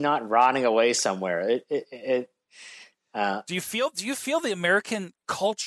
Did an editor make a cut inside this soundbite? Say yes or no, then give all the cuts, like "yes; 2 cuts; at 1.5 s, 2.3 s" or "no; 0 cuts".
no; 0 cuts